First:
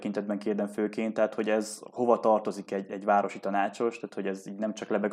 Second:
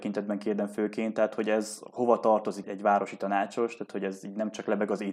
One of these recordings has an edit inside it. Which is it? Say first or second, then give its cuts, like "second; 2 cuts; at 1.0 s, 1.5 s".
second; 1 cut; at 2.6 s